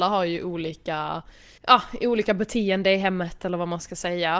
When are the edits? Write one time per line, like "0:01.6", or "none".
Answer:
0:01.6